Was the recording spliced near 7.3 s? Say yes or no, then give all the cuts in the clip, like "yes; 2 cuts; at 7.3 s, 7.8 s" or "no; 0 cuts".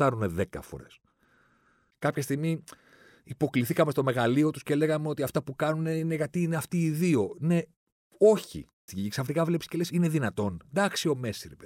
no; 2 cuts; at 1.9 s, 8.9 s